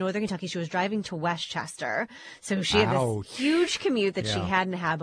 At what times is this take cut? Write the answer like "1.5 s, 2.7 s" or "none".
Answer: none

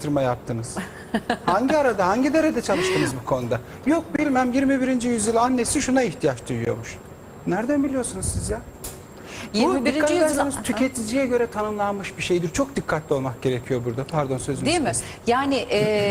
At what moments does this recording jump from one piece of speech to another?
none

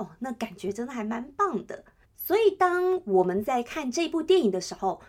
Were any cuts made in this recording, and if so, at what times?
2.0 s

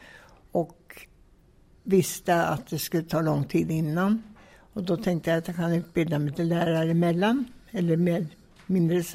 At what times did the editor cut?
none

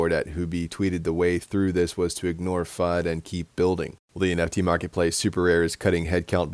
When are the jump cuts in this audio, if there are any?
4.0 s

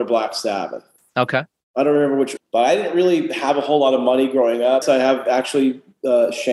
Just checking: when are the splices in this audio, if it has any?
2.4 s, 4.8 s

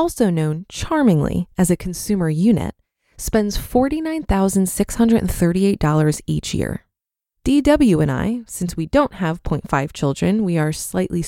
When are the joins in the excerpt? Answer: none

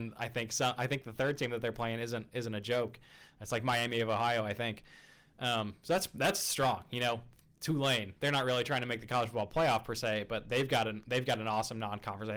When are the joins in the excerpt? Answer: none

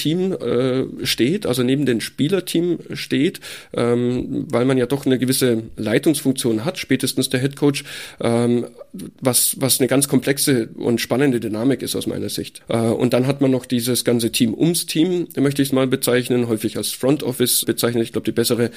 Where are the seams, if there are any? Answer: 12.6 s, 17.6 s

